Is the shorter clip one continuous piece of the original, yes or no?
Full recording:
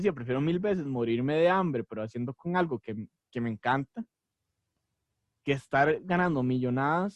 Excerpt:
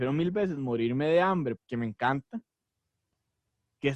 no